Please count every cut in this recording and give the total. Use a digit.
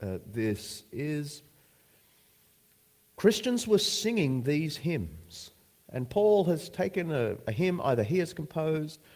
0